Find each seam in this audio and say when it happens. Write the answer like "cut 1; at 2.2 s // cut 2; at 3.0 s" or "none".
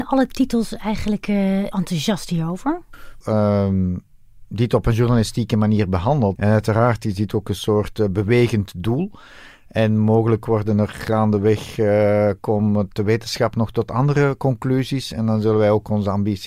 cut 1; at 1.7 s // cut 2; at 3.2 s // cut 3; at 6.4 s